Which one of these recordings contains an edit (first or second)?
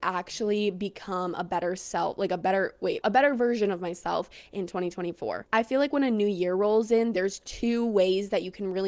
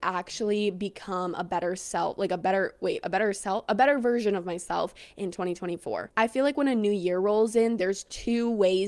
first